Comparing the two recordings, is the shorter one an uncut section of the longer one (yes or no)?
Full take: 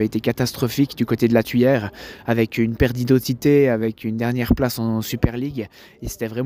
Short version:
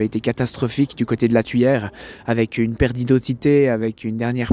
yes